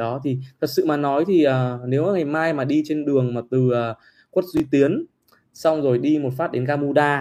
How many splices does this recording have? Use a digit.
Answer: 0